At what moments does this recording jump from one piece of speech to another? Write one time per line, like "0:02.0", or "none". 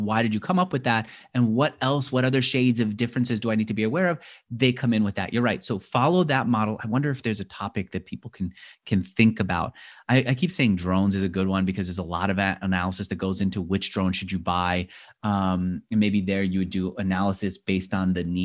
none